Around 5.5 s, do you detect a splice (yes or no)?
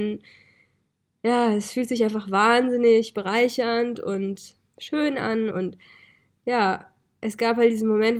yes